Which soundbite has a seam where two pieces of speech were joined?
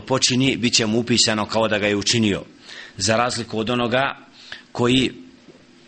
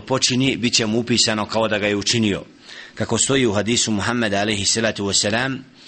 first; 1 cut; at 2.9 s

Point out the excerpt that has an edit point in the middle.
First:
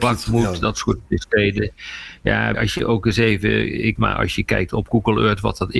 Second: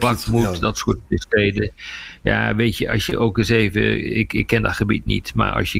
first; 2 cuts; at 2.5 s, 4.0 s

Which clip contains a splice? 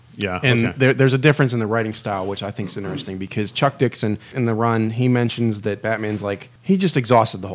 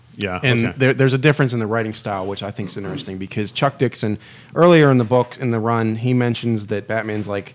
first; 1 cut; at 4.3 s

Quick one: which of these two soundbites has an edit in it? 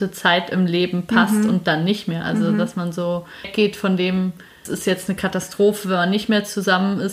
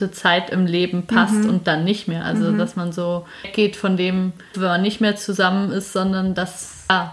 second; 1 cut; at 4.5 s

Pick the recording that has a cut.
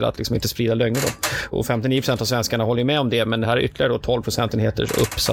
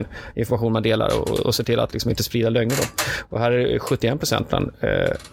first; 1 cut; at 1.5 s

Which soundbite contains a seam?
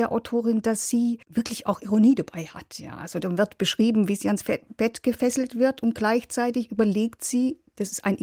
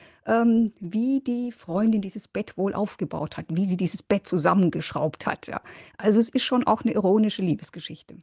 first; 1 cut; at 1.2 s

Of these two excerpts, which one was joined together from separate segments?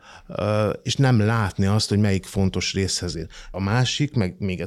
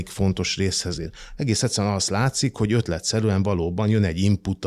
first; 1 cut; at 3.5 s

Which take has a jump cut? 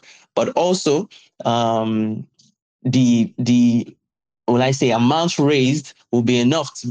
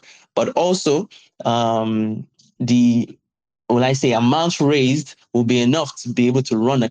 second; 1 cut; at 2.6 s

